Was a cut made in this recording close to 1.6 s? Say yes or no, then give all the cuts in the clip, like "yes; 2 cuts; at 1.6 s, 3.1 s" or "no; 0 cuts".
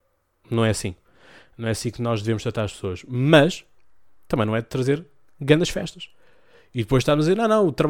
no; 0 cuts